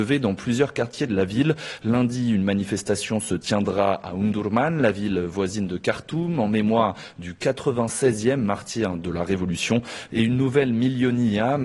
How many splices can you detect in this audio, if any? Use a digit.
0